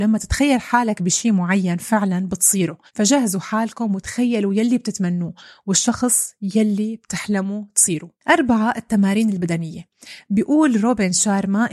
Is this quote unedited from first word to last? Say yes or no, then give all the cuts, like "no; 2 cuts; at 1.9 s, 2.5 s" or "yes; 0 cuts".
no; 1 cut; at 2.9 s